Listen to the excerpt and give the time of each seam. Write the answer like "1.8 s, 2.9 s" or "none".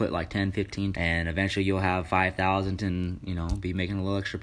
0.9 s, 2.8 s